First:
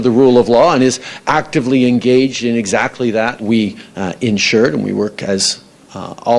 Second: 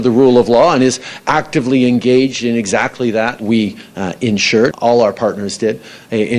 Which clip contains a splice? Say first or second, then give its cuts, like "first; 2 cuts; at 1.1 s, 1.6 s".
second; 1 cut; at 4.7 s